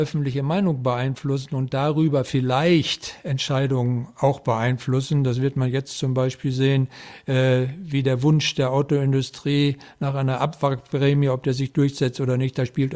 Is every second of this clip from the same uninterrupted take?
yes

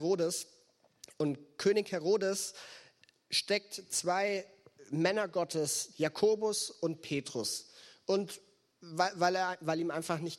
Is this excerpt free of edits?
no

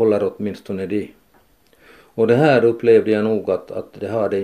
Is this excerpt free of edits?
yes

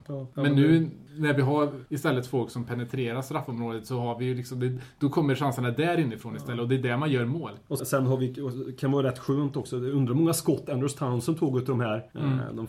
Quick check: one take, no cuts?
no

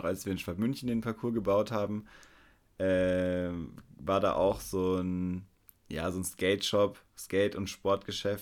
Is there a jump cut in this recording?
no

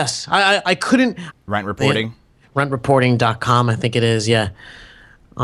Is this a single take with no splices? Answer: no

